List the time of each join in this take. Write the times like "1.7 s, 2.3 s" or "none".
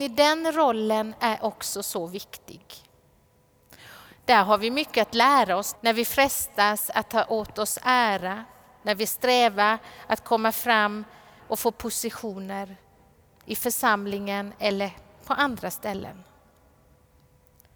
5.7 s

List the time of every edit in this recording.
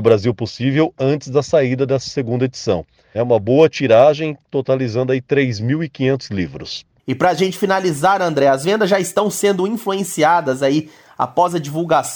3.1 s

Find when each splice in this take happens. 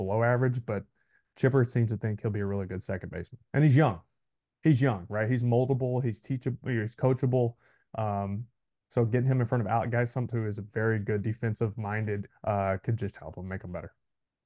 10.3 s, 12.3 s

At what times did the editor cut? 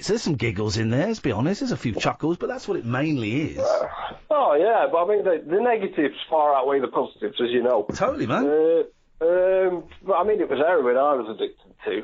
none

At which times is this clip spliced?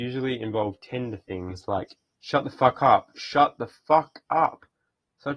none

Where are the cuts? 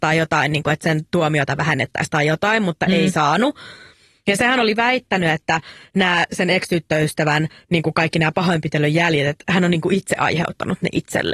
none

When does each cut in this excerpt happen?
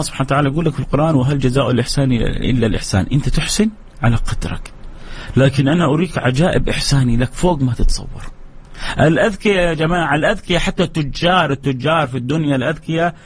none

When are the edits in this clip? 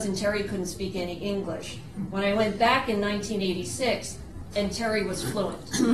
4.5 s

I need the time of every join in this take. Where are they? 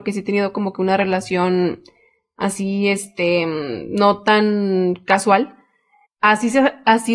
6.0 s

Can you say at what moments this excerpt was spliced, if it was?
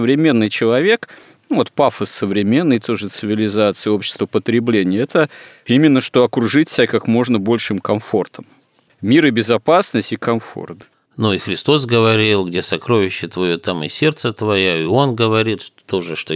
8.9 s, 11.1 s

